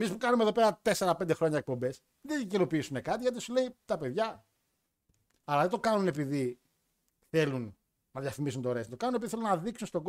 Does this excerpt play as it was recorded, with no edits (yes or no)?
no